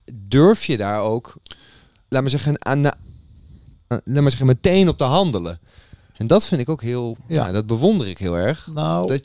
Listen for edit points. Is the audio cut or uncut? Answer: cut